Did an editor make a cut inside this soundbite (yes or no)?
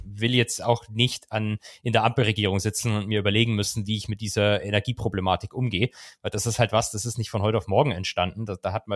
no